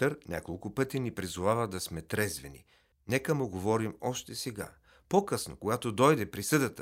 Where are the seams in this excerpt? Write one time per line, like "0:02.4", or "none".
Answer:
0:02.9